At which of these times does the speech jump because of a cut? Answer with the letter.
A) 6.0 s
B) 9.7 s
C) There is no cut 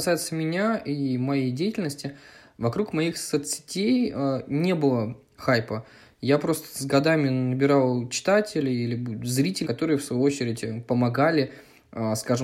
B